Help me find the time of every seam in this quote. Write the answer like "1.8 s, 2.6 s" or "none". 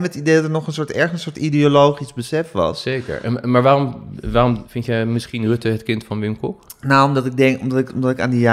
none